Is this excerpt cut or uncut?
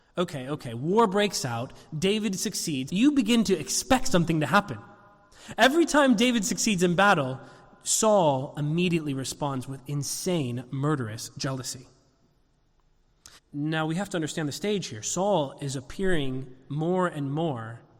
cut